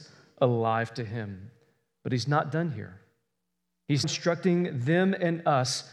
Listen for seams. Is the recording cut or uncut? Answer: cut